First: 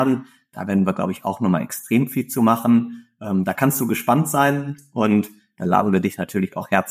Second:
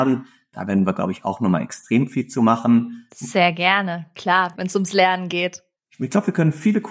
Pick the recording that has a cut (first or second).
second